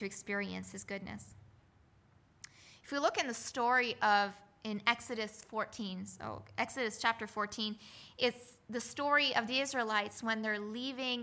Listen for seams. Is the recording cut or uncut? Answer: uncut